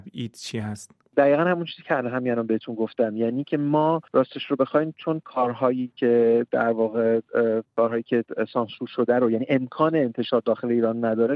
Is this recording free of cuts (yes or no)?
no